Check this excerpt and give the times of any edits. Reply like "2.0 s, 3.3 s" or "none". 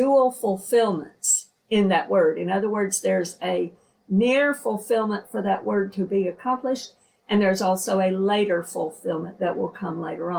none